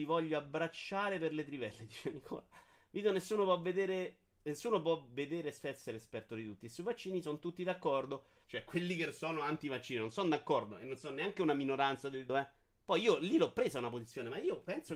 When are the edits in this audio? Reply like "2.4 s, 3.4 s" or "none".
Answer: 6.6 s, 8.4 s, 12.3 s